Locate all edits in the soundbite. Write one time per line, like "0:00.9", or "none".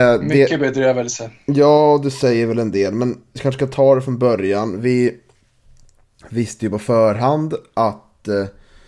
none